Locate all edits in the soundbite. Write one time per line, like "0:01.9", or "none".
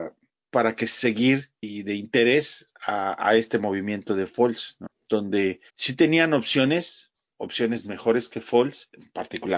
0:05.7
0:07.3